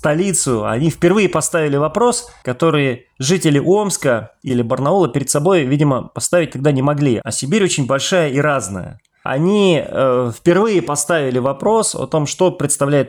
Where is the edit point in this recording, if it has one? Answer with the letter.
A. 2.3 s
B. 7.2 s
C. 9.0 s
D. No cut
B